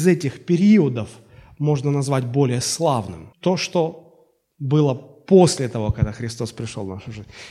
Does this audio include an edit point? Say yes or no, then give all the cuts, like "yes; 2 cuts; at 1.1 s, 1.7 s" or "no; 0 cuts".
yes; 1 cut; at 3.3 s